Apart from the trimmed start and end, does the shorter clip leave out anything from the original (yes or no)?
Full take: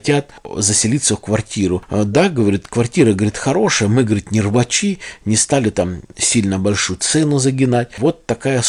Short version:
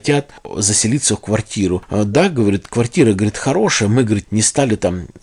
yes